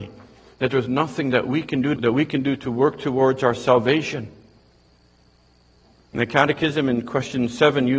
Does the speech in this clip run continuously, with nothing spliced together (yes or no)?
no